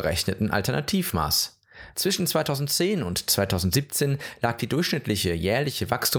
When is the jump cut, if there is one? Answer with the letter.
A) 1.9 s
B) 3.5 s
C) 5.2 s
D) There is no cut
A